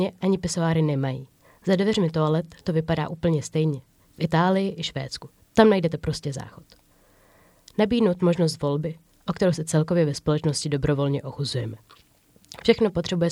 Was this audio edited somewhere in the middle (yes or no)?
no